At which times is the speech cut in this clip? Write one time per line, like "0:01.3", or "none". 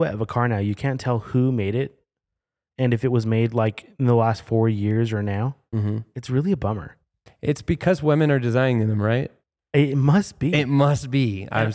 none